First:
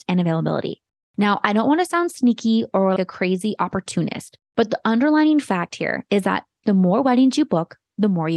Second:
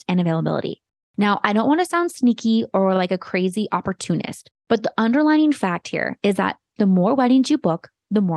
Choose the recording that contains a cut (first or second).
first